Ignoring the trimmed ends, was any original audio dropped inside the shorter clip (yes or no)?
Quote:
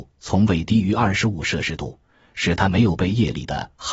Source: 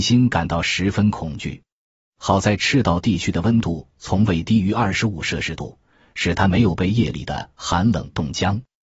no